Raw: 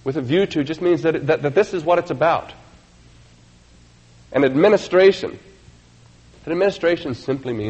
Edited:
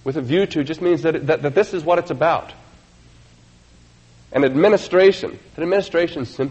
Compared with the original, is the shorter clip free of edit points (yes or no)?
no